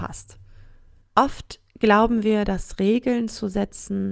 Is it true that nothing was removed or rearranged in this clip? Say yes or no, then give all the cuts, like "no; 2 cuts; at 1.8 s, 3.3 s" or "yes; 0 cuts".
no; 1 cut; at 1.0 s